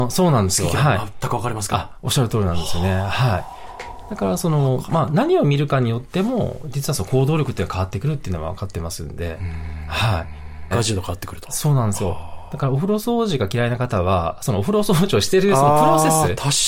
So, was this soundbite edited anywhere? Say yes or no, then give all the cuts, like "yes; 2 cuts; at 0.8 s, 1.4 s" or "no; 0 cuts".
yes; 1 cut; at 10.7 s